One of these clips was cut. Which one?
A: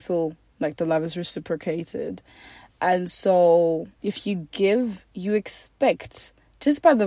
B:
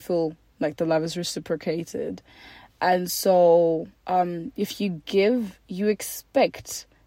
A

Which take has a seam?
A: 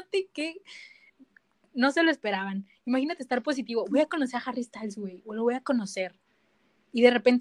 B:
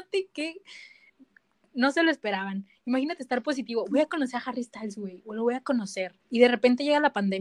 B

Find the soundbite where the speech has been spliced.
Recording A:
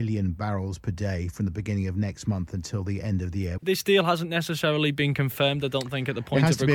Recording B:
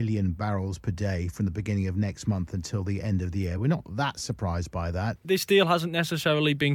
A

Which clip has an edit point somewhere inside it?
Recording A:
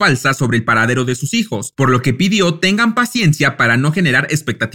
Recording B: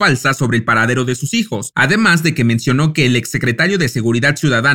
B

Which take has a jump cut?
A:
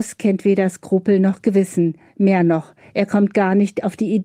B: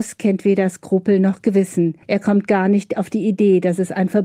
B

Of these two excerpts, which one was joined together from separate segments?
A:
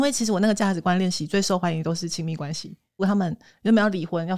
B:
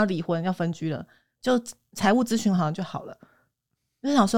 A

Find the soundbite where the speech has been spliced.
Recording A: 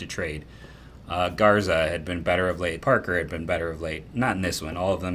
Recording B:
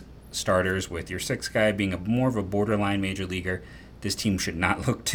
A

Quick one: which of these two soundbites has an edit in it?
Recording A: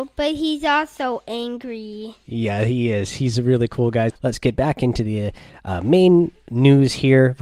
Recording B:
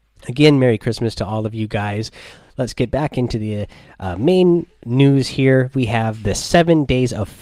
A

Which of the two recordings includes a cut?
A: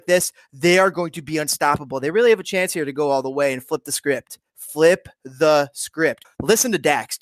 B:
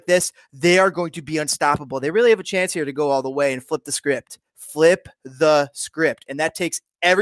A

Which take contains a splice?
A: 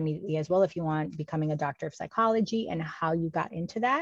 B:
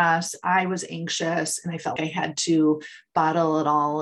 B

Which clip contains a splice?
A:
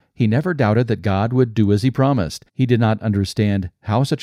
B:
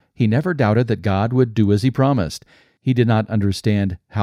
A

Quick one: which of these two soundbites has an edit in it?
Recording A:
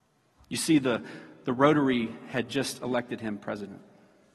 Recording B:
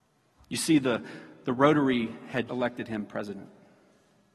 B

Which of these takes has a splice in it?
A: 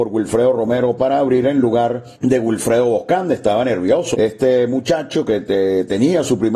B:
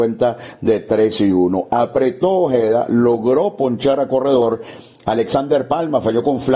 A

